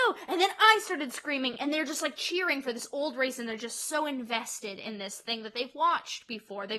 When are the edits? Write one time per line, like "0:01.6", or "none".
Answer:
none